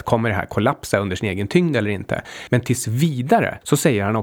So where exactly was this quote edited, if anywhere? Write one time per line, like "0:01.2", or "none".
none